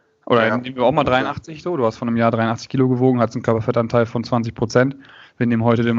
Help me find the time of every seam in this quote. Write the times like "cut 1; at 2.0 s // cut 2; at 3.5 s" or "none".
none

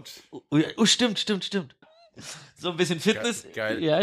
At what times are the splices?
cut 1; at 1.8 s

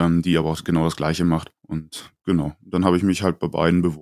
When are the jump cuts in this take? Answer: cut 1; at 1.6 s

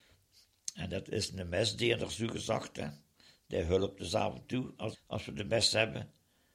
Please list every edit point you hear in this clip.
cut 1; at 4.9 s

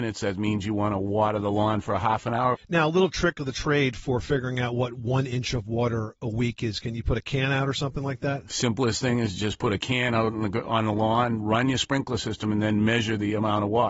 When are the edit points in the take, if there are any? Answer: cut 1; at 2.5 s

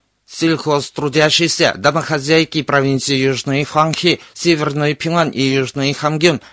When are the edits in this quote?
none

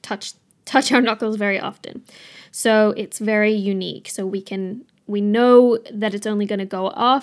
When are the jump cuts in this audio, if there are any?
none

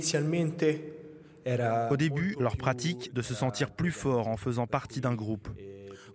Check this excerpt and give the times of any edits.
cut 1; at 3.1 s

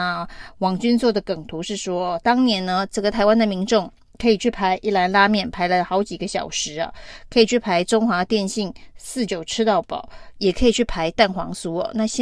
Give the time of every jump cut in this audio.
cut 1; at 9.3 s

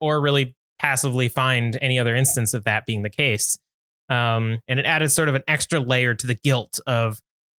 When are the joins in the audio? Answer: cut 1; at 4.7 s

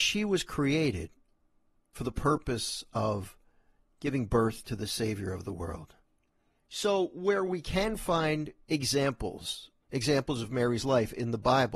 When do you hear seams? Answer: cut 1; at 6.6 s // cut 2; at 9.8 s

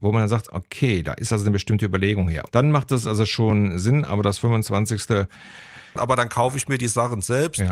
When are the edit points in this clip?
cut 1; at 2.5 s // cut 2; at 6.0 s

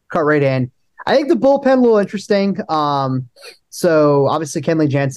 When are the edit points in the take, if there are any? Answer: none

